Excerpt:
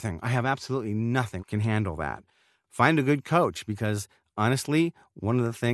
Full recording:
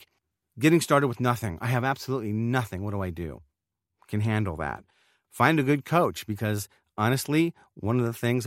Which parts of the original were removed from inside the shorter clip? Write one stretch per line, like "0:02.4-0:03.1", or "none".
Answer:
0:02.8-0:04.0